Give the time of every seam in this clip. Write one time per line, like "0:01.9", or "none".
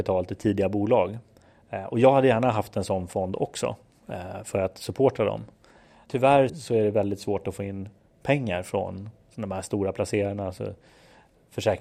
0:06.5